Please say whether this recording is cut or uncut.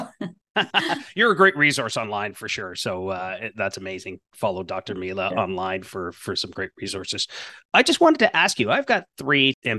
uncut